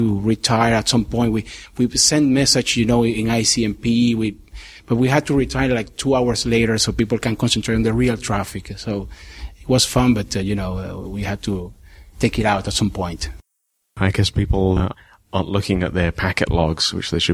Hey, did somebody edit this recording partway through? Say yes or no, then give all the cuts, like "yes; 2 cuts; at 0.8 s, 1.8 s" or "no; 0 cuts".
no; 0 cuts